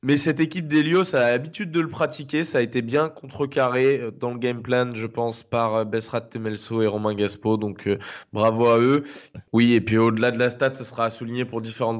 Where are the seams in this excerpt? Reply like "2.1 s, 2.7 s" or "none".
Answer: 9.3 s